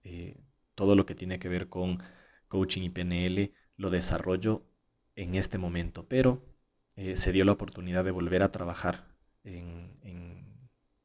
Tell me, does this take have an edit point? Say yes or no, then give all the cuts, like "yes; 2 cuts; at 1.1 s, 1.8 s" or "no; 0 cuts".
no; 0 cuts